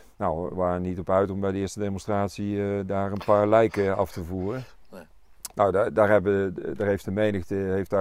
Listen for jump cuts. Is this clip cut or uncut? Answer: cut